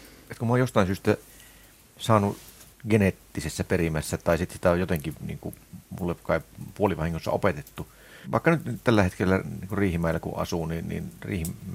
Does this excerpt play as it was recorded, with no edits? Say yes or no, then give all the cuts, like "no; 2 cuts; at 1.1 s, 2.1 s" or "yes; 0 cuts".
no; 1 cut; at 8.2 s